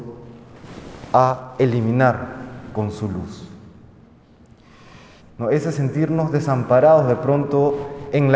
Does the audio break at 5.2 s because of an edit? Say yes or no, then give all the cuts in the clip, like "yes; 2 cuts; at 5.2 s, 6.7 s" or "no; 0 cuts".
yes; 1 cut; at 5.2 s